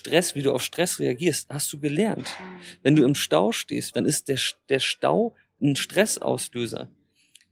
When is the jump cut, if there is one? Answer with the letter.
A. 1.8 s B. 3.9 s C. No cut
B